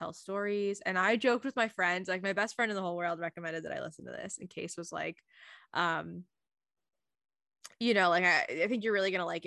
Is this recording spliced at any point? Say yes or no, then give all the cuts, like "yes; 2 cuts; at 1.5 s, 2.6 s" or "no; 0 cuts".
no; 0 cuts